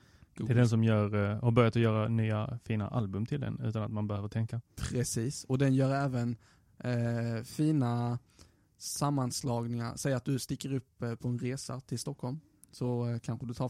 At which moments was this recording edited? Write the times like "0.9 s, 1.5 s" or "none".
none